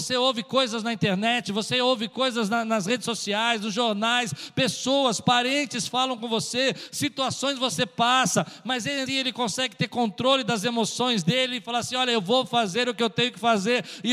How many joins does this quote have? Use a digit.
1